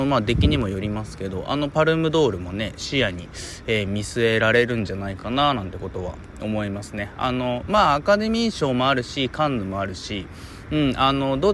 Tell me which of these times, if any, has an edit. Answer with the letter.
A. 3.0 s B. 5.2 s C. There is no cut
C